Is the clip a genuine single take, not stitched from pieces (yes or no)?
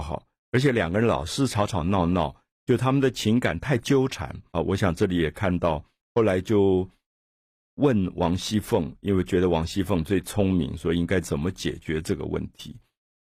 no